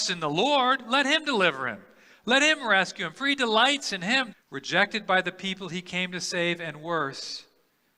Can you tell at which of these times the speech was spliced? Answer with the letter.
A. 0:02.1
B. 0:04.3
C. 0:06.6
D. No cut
B